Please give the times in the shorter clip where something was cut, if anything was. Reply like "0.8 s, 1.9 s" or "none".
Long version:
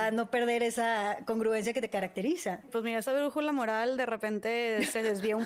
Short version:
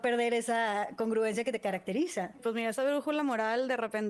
none

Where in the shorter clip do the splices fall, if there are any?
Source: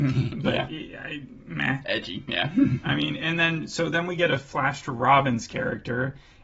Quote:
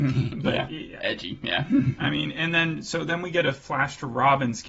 1.0 s

